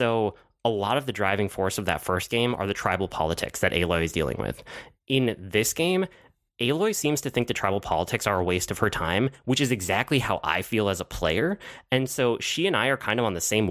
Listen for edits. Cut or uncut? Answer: uncut